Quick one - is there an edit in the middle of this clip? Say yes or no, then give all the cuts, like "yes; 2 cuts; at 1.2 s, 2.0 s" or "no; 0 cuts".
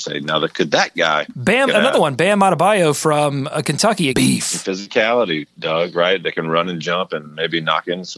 yes; 2 cuts; at 1.7 s, 4.1 s